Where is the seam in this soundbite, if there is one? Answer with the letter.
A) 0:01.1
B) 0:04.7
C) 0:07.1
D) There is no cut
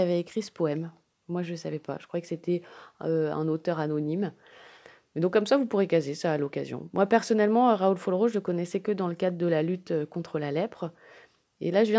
D